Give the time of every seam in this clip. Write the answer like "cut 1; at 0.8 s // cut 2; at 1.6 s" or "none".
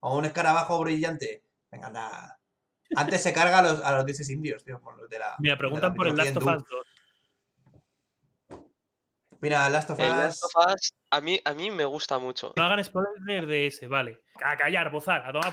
cut 1; at 12.6 s // cut 2; at 14.4 s